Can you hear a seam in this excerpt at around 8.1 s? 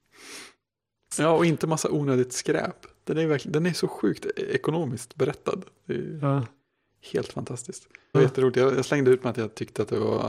yes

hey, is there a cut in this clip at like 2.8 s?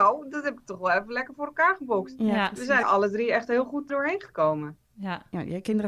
yes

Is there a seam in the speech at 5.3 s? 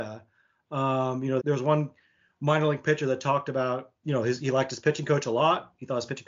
no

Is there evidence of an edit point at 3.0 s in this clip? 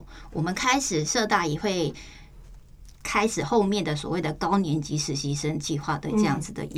yes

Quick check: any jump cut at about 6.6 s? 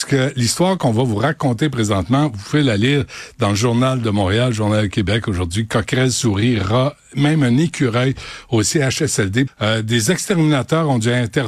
no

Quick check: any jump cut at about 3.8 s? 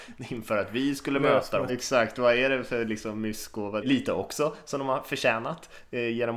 yes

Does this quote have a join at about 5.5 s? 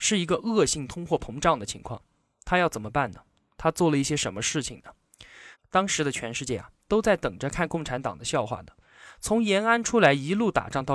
yes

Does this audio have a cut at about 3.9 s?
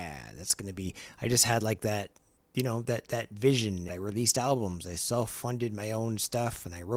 yes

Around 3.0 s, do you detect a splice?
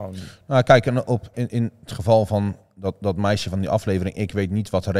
no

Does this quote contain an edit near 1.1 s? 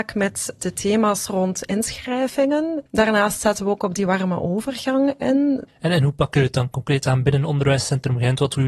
no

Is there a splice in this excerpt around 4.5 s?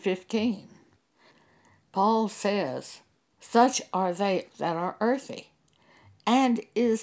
yes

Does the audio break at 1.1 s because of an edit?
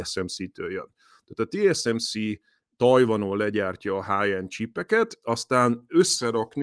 no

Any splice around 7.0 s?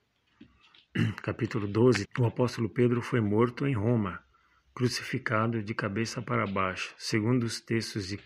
no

